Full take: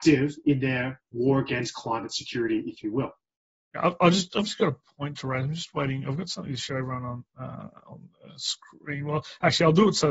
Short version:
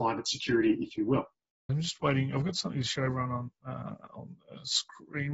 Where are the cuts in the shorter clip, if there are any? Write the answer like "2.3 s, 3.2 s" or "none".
1.7 s